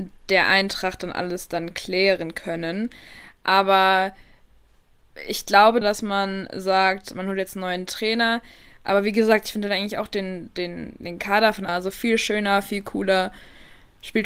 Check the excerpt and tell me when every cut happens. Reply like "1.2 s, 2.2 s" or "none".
5.8 s, 11.7 s